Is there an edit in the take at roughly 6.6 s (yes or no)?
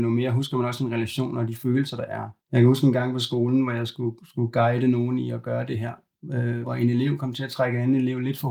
yes